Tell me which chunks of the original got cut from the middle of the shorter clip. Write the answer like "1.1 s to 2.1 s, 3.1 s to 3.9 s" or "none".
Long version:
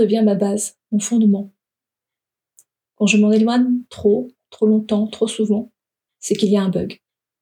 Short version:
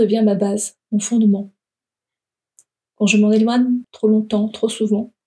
3.8 s to 4.4 s